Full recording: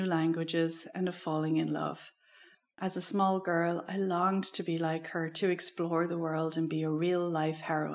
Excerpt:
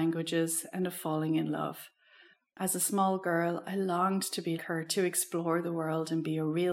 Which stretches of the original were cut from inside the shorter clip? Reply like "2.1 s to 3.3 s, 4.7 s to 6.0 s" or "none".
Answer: 4.8 s to 5.0 s